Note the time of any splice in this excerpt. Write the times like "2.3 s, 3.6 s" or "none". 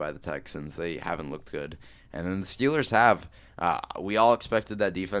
none